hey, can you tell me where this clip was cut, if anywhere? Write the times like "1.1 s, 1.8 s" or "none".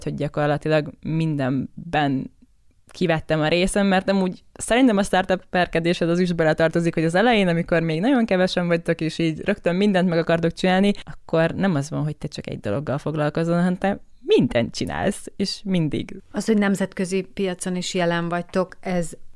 16.2 s